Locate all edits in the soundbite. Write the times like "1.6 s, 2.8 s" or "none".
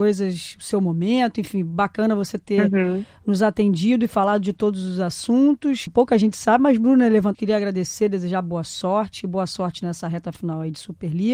5.9 s, 7.3 s

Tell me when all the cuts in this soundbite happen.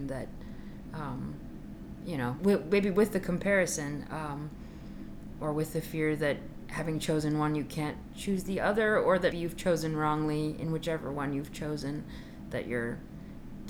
2.4 s, 9.3 s

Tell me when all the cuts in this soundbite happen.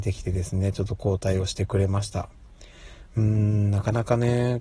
none

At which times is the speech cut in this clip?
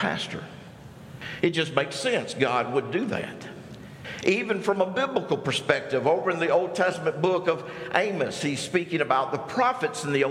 1.4 s

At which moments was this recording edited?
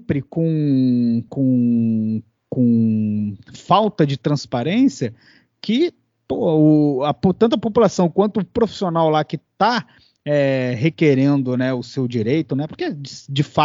1.3 s

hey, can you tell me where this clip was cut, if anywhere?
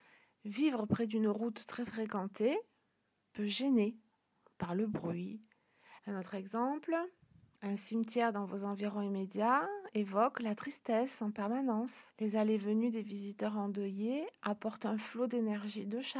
6.0 s, 12.1 s

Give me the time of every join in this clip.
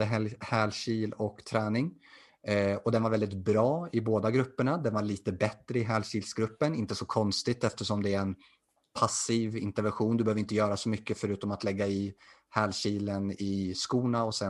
none

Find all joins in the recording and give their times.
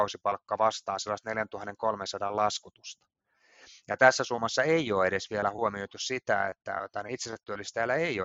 none

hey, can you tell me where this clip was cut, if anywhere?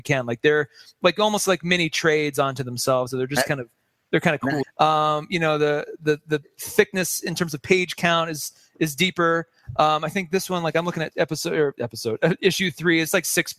4.6 s

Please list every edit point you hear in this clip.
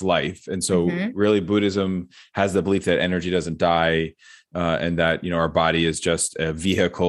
none

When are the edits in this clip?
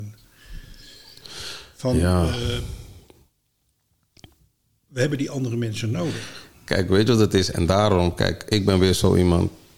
none

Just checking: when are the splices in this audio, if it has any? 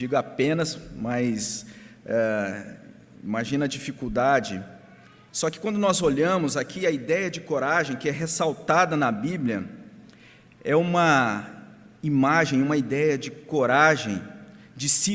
5.3 s

